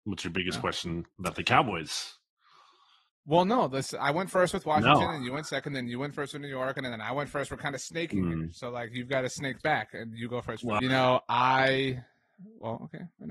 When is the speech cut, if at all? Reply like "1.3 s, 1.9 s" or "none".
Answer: 6.8 s, 10.8 s